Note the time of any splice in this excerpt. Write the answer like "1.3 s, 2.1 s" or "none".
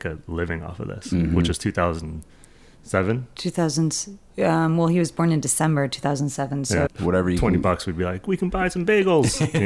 6.9 s